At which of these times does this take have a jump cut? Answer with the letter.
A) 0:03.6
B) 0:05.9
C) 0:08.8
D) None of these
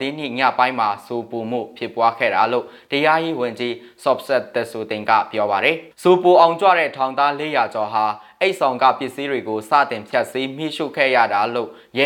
B